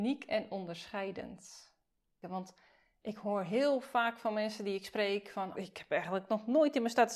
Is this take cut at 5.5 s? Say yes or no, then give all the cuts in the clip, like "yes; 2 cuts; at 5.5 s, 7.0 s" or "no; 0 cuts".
yes; 2 cuts; at 2.2 s, 5.5 s